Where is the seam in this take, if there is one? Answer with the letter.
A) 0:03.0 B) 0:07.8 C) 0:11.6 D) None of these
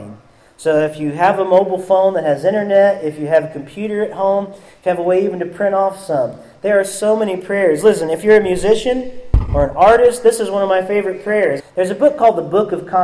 C